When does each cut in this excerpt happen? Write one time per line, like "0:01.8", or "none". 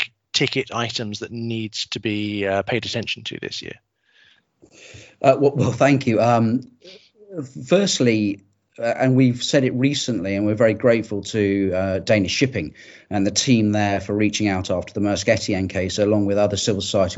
none